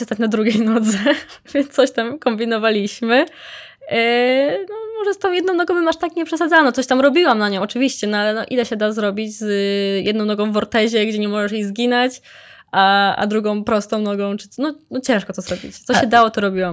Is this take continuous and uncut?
yes; 0 cuts

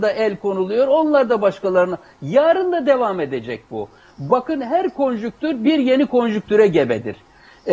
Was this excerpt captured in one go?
yes; 0 cuts

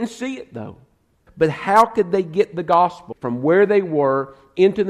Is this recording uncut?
no; 2 cuts; at 1.3 s, 3.1 s

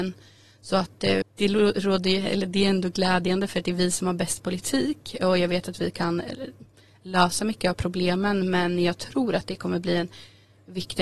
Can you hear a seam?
yes; 1 cut; at 1.2 s

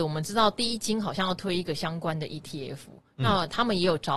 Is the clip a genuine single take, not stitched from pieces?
yes; 0 cuts

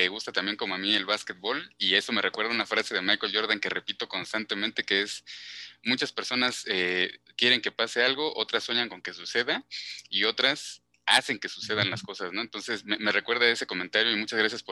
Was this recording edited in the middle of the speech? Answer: no; 0 cuts

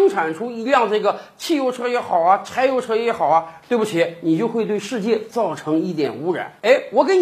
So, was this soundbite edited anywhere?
no; 0 cuts

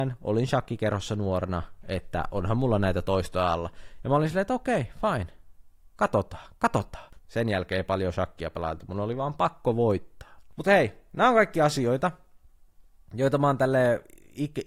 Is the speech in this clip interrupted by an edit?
yes; 1 cut; at 7.2 s

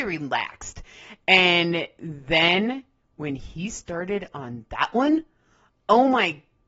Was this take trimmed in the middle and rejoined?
no; 0 cuts

